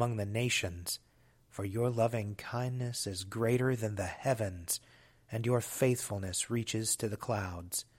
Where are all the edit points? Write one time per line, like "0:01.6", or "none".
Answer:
none